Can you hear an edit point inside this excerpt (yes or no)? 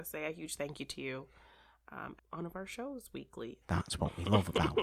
yes